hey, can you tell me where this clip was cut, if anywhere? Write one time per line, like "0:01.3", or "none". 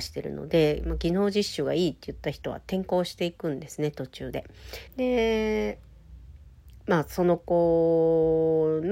0:04.9